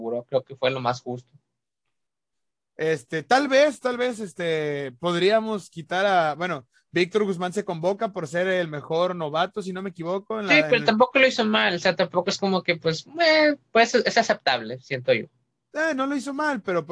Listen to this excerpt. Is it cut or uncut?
uncut